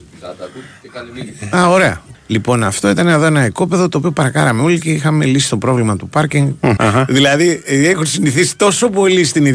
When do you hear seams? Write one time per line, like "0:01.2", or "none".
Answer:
0:02.1
0:06.8